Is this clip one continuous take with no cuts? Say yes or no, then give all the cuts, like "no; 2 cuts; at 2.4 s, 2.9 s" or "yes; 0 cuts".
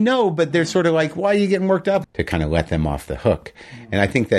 no; 1 cut; at 2.0 s